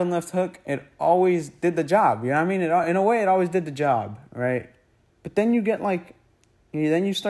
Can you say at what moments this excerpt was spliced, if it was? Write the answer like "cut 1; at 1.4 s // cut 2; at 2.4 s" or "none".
none